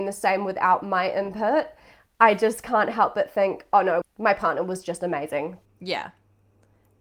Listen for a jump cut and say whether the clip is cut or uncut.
cut